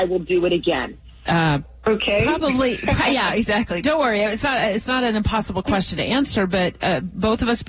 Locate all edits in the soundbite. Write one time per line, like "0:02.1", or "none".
0:01.3
0:03.8